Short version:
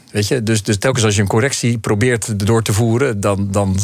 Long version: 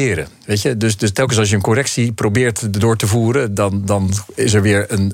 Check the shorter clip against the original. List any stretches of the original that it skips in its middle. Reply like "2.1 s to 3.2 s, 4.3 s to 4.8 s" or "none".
none

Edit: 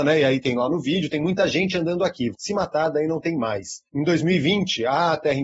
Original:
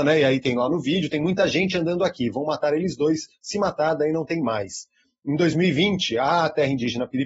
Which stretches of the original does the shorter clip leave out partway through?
2.3 s to 3.4 s, 4.9 s to 5.2 s

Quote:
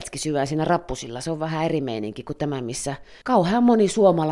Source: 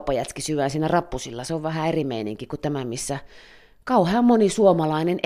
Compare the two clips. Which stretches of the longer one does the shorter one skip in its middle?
3.4 s to 3.8 s

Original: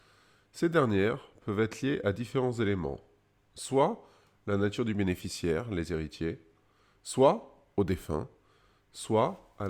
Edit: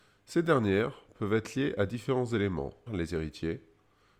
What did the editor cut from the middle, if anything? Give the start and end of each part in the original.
3.1 s to 5.6 s

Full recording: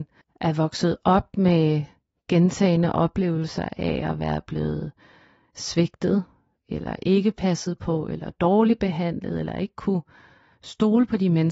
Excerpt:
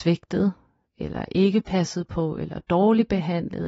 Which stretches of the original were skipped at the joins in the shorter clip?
none

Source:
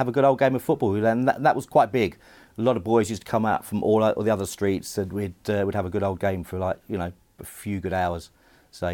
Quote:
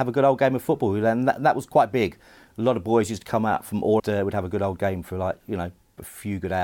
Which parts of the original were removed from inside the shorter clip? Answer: 4.0 s to 5.4 s

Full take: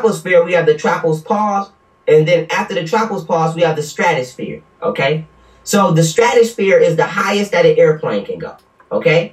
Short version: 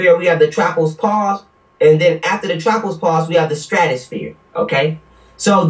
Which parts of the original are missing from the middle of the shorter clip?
none

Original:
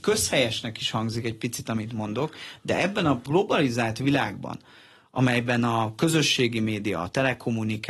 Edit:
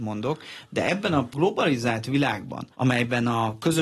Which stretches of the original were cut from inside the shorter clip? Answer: 4.6 s to 5.1 s

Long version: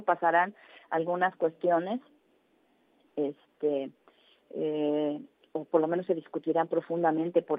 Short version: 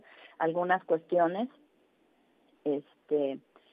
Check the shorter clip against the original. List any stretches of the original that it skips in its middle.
none

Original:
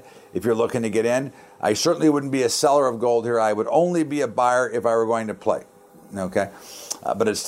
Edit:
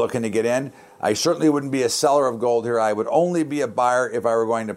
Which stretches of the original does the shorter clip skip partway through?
none

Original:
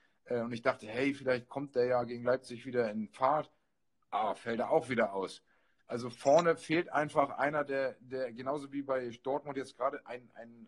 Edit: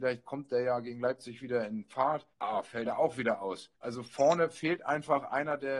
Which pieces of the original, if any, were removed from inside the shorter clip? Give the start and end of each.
3.6 s to 4.0 s, 5.5 s to 5.8 s

